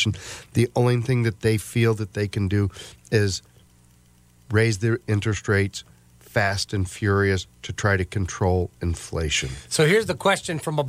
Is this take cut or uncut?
uncut